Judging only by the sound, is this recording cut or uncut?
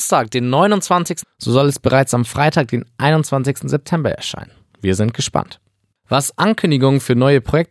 cut